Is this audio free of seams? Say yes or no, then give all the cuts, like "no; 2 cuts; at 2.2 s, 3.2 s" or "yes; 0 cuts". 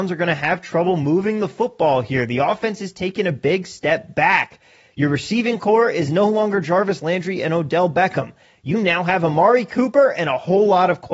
yes; 0 cuts